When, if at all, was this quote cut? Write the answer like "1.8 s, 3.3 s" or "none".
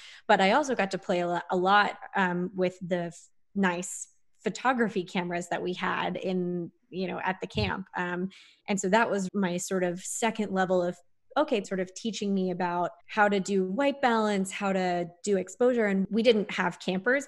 9.3 s, 11.6 s, 13.0 s